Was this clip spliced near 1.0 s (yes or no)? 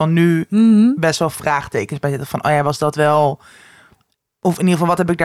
no